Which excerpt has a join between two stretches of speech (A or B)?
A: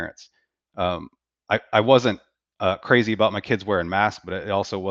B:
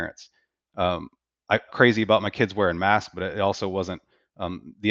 B